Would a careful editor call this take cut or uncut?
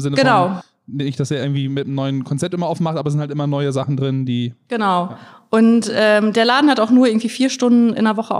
uncut